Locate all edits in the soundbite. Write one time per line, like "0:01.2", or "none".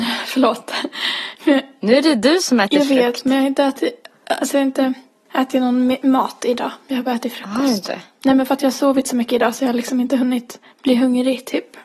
none